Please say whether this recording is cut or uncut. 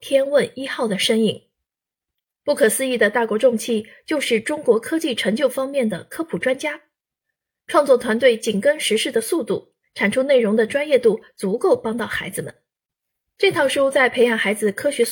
cut